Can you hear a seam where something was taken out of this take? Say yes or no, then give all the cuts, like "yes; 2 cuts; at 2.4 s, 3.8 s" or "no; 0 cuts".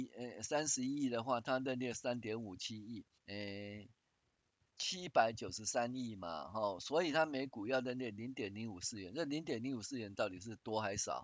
yes; 1 cut; at 3.2 s